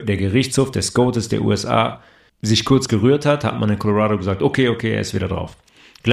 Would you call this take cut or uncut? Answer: cut